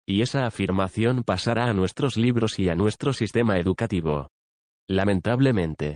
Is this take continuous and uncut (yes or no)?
yes